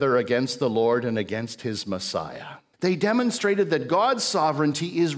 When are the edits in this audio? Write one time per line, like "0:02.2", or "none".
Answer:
0:02.7